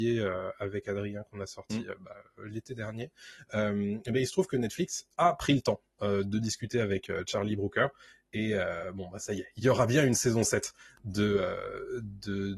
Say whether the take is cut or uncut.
uncut